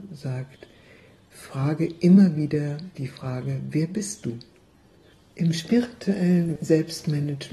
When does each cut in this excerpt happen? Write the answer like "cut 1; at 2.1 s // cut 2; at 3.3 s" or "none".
none